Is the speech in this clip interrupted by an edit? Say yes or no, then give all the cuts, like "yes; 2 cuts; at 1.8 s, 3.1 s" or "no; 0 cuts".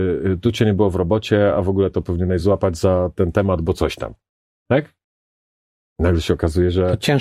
no; 0 cuts